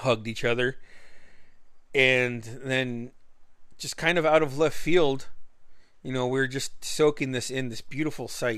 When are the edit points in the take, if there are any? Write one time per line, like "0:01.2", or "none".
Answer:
none